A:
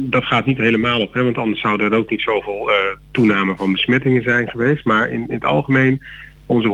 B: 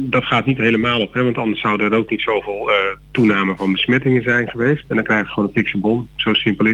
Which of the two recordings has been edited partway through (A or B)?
B